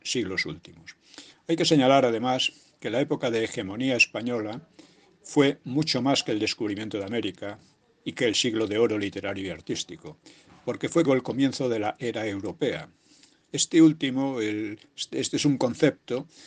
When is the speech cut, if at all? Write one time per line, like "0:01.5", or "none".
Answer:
0:11.1